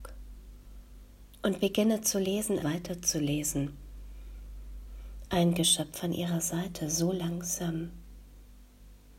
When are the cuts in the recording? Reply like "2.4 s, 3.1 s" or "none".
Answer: 2.6 s, 5.2 s